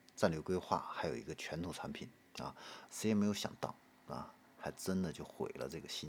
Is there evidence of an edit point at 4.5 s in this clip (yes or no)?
yes